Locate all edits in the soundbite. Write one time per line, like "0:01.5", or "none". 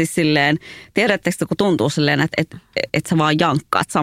0:02.9